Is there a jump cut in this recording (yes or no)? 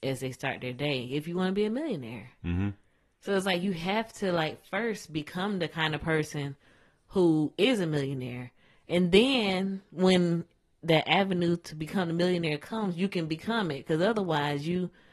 no